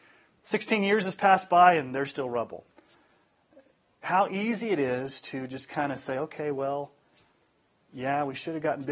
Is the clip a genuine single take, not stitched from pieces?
yes; 0 cuts

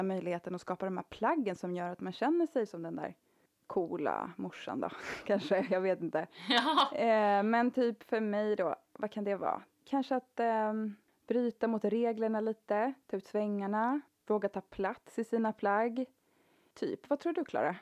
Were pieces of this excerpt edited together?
no; 0 cuts

